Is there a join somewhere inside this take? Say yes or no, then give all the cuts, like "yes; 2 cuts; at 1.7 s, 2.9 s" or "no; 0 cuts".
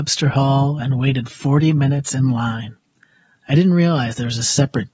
no; 0 cuts